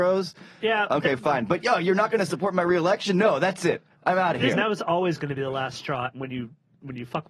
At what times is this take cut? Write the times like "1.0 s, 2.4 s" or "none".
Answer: 4.5 s, 6.1 s